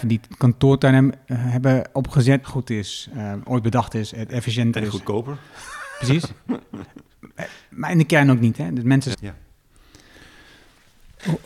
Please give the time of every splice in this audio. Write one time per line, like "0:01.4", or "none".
0:02.4
0:09.1

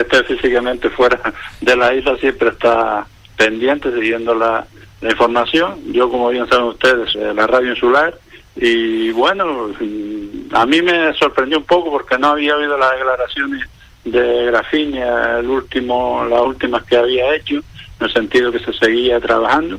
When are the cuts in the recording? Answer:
0:07.1

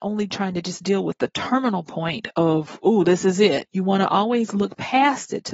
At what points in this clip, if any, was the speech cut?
0:03.7

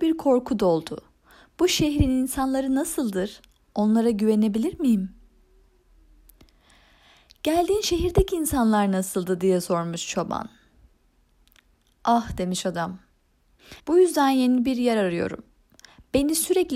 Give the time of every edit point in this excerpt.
0:13.8

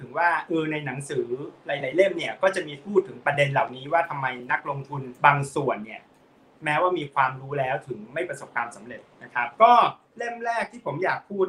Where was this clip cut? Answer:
0:05.2
0:09.5

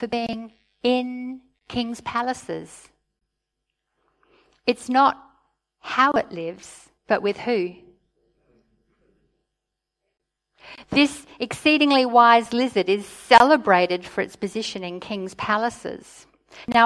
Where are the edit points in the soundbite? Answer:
0:07.0

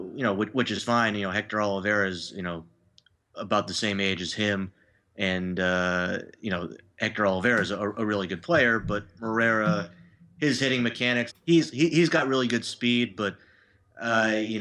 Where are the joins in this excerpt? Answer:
0:11.3

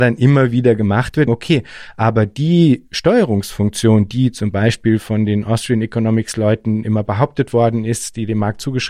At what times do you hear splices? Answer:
0:01.3

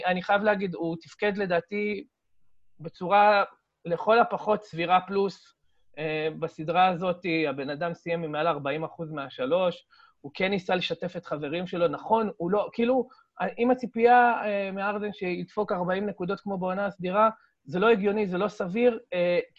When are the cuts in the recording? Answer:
none

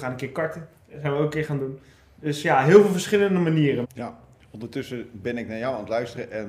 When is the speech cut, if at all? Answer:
0:03.8

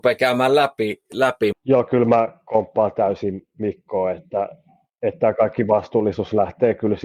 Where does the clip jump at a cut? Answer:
0:01.5

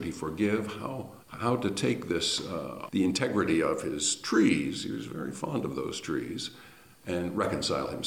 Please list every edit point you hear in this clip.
0:01.2
0:02.9

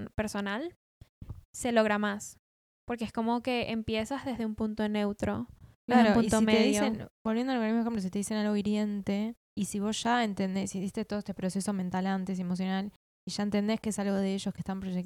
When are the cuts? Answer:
0:09.4

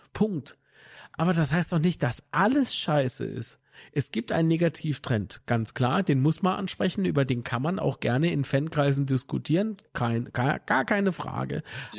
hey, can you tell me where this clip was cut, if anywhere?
none

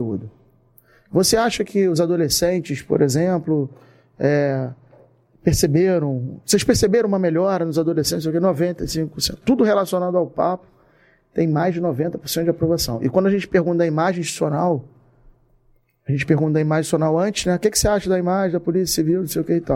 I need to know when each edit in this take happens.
none

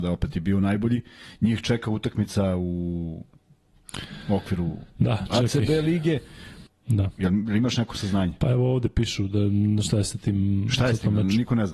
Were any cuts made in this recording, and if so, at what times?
0:04.9
0:06.7

